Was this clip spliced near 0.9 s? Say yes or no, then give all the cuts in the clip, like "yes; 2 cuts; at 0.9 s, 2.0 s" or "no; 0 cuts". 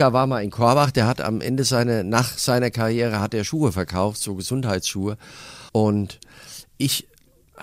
no; 1 cut; at 5.7 s